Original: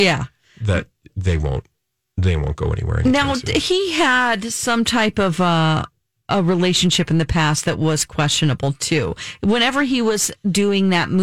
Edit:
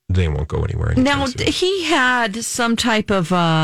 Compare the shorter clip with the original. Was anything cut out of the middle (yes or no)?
no